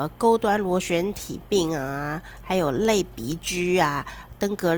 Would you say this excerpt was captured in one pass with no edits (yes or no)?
yes